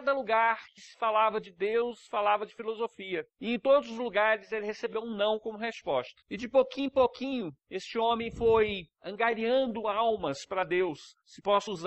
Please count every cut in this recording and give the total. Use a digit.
1